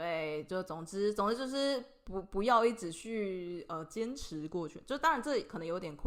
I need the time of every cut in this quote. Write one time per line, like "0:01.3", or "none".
none